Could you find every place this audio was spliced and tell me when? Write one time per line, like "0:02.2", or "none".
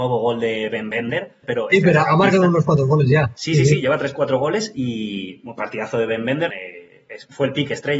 0:01.4
0:06.5